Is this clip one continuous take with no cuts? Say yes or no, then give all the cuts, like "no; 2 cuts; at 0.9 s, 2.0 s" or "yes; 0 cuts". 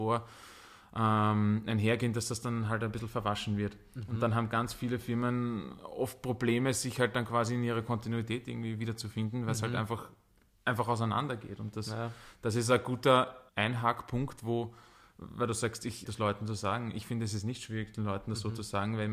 no; 2 cuts; at 13.5 s, 16.1 s